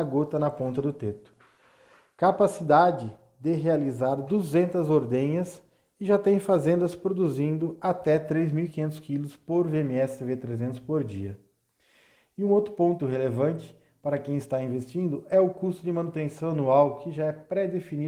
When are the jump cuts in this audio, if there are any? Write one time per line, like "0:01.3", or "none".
0:13.0